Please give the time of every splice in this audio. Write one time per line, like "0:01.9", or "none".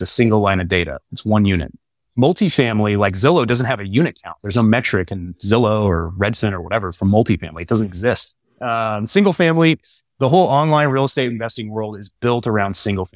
0:08.6

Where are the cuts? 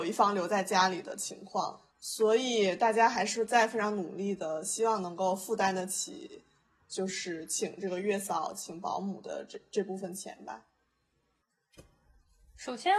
0:01.9

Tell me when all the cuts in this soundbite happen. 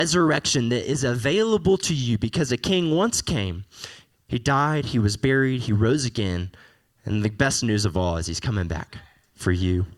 none

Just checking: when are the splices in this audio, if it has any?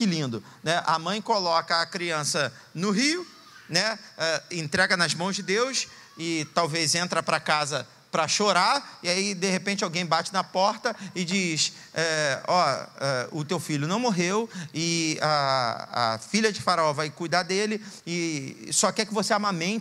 none

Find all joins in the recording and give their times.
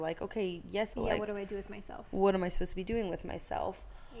0:00.9

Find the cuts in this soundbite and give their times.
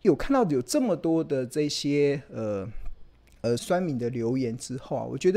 0:03.6

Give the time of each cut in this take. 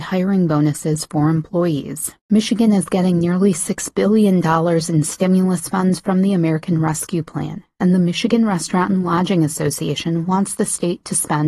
0:02.2

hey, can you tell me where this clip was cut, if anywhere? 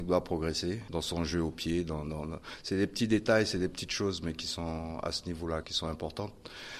0:05.6

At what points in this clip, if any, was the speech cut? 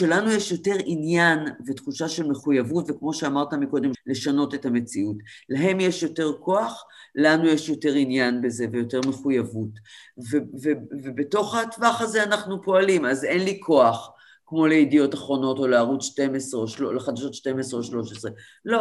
0:03.9

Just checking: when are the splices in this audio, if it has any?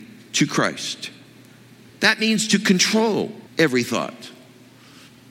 0:01.9
0:03.5

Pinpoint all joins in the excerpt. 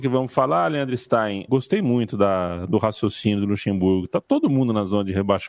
0:01.5

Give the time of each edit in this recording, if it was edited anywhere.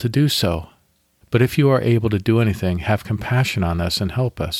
0:01.2

